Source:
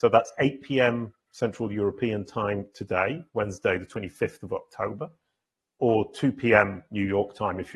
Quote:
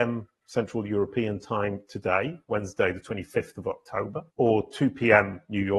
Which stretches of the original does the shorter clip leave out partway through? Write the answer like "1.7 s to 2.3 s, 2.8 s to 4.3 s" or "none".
5.1 s to 5.7 s